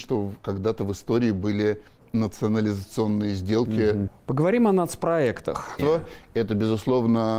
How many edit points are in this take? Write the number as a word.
two